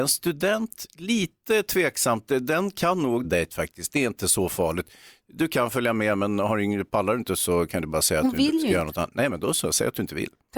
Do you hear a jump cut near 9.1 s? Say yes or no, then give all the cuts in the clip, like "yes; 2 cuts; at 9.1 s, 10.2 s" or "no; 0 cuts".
no; 1 cut; at 3.2 s